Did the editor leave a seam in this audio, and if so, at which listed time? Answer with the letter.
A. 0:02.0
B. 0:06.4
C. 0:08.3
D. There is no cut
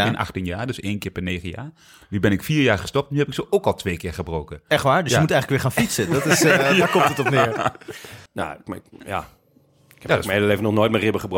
C